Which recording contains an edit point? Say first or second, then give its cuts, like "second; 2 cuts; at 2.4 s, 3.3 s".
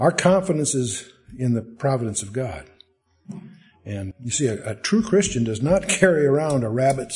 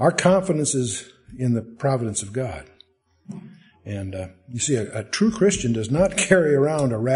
first; 1 cut; at 4.1 s